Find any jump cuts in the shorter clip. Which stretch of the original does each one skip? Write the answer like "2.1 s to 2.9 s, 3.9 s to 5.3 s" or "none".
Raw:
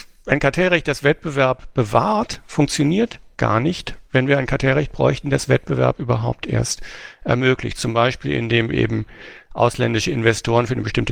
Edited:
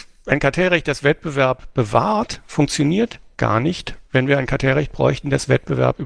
none